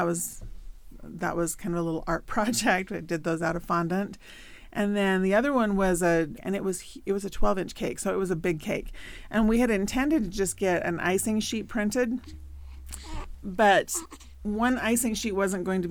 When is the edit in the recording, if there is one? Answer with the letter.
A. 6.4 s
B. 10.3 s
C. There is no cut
A